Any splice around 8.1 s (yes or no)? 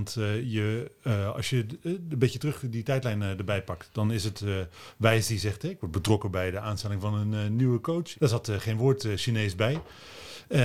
yes